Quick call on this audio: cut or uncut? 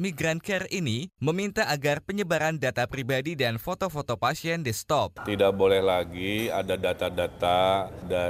cut